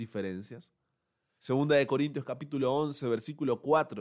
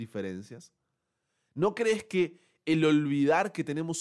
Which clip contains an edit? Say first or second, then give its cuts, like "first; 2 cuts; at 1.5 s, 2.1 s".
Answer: first; 1 cut; at 1.4 s